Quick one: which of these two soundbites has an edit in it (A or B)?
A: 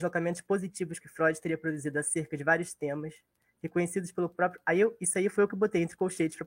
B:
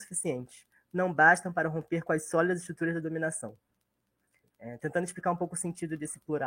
B